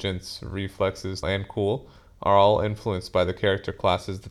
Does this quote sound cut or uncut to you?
cut